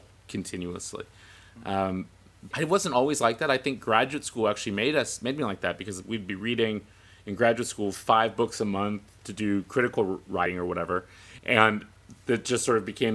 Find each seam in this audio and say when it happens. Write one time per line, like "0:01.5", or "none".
0:02.5
0:11.4